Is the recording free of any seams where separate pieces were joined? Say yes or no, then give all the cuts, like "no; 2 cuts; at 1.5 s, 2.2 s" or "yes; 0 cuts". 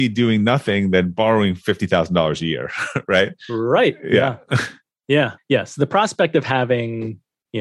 no; 1 cut; at 5.4 s